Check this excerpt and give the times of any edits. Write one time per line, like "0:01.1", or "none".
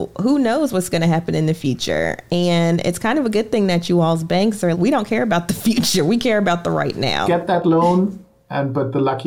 0:04.7
0:07.2